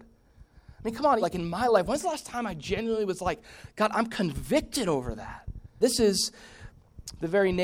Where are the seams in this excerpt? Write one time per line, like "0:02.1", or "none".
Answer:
0:01.2
0:05.8